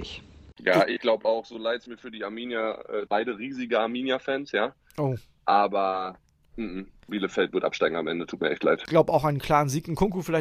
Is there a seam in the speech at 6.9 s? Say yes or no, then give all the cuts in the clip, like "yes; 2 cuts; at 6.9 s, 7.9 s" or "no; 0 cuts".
no; 1 cut; at 3.1 s